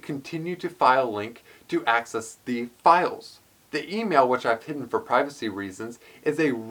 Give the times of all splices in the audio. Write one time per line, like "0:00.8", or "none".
0:03.7